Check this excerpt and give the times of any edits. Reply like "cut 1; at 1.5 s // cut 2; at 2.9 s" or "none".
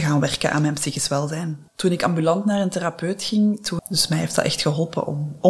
cut 1; at 1.7 s // cut 2; at 3.8 s